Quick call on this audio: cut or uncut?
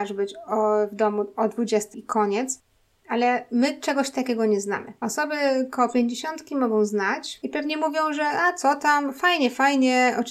cut